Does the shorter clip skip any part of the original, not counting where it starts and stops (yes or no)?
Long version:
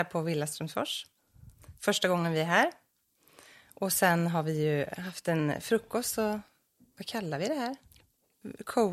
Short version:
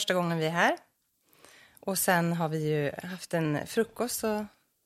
no